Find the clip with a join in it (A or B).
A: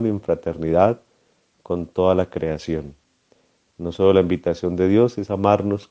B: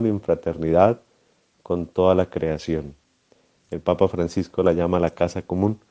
B